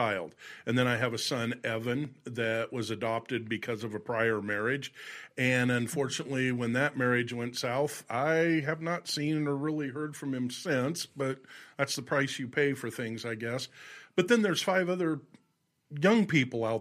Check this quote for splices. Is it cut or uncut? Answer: uncut